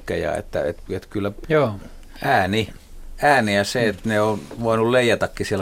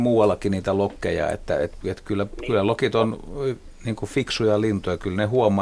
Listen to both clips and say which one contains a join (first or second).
first